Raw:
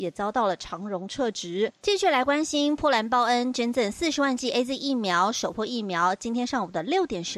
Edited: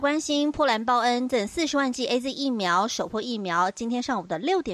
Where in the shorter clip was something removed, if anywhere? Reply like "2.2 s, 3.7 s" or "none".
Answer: 1.3 s